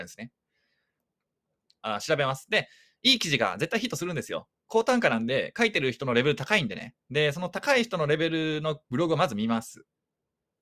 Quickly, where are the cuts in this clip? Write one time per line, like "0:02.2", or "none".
0:01.8
0:07.0